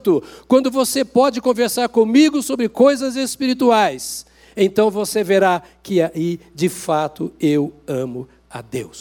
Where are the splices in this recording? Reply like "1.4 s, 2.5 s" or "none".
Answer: none